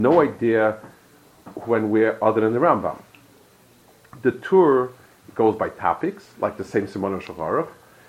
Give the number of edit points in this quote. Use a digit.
1